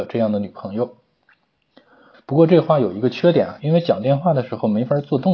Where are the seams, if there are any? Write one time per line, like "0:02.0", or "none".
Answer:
0:02.1
0:03.6